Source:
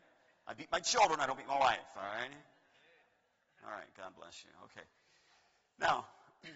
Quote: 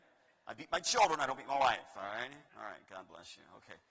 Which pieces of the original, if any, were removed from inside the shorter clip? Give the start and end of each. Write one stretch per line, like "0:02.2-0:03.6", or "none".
0:02.5-0:03.6

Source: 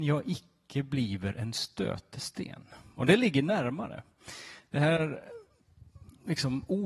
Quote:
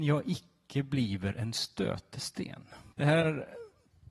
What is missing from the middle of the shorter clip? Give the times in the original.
0:02.9-0:04.7

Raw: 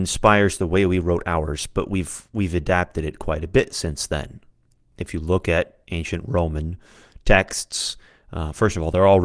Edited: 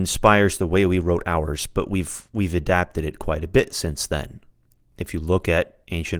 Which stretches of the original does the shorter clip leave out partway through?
none

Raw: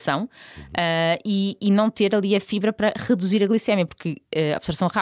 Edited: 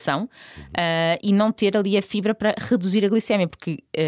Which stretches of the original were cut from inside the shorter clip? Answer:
0:01.2-0:01.6

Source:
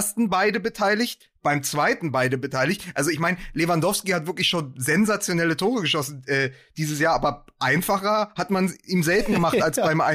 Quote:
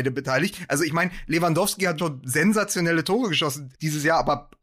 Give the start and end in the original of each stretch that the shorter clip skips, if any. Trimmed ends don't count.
0:04.2-0:04.5
0:06.2-0:06.7

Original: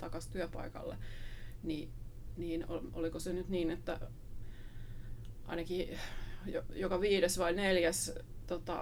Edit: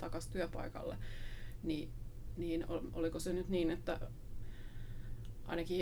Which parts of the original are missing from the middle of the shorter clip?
none

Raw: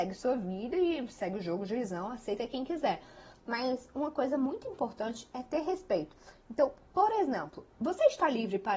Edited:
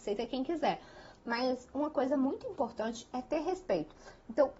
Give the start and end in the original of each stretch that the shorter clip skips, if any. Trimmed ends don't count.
none

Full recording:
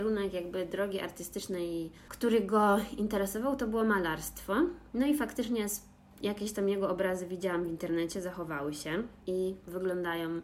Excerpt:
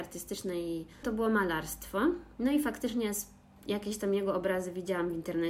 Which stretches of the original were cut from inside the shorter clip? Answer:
0:02.1-0:03.6

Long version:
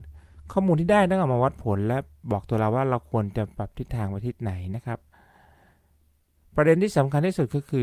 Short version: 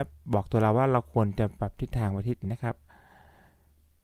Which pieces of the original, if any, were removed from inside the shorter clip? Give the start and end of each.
0:04.4-0:04.7

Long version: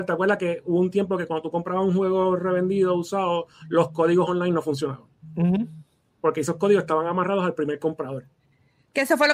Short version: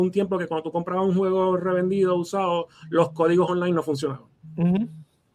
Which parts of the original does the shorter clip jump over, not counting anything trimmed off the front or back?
none

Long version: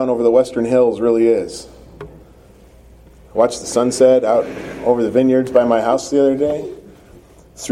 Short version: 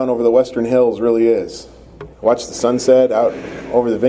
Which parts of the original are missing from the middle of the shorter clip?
0:02.1-0:03.3

